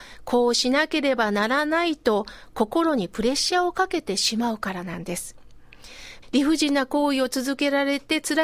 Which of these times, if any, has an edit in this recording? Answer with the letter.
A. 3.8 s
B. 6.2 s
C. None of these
B